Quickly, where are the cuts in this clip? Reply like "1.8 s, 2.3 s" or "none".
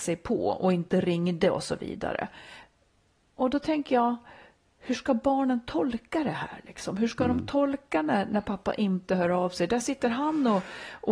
none

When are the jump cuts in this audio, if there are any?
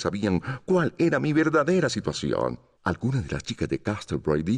2.7 s

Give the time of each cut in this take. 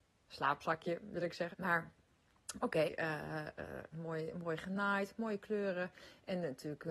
1.5 s, 2.8 s, 3.9 s

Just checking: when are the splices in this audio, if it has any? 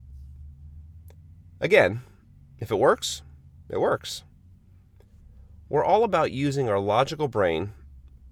none

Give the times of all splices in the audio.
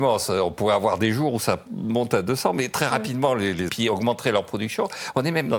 3.7 s

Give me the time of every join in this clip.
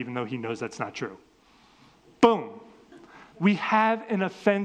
3.3 s

